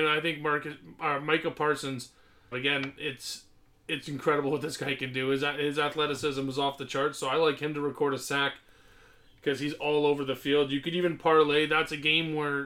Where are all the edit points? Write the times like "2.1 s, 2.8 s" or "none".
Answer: 2.5 s